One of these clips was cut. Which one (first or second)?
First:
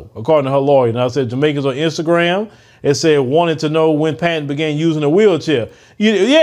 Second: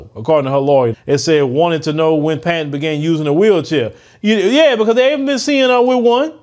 second